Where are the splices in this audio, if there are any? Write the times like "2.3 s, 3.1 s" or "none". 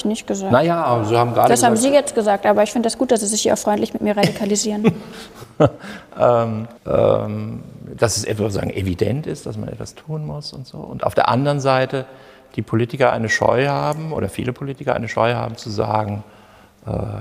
6.8 s